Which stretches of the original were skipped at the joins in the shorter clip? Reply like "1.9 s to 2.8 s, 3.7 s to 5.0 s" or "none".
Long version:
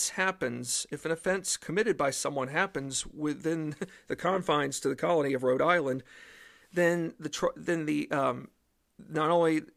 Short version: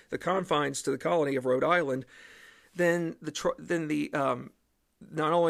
none